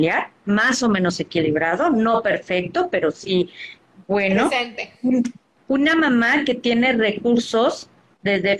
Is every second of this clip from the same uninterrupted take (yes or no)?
no